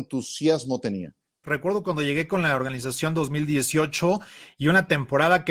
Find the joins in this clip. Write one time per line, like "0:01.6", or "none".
0:01.4